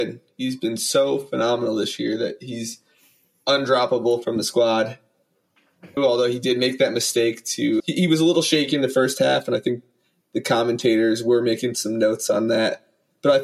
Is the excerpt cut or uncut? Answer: cut